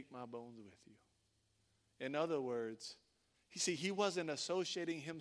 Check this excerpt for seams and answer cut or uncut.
cut